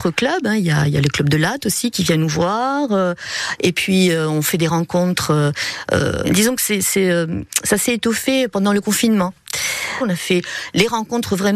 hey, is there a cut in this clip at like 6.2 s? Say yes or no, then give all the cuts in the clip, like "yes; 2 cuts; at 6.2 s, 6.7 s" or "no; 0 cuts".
yes; 2 cuts; at 6.2 s, 10.0 s